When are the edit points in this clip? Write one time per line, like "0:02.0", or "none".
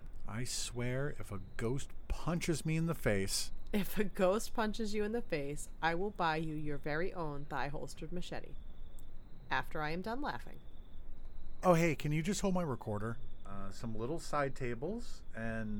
0:11.6
0:13.4